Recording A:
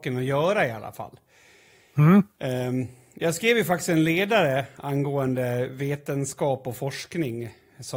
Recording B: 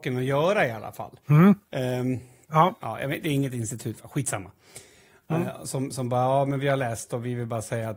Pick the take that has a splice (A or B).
B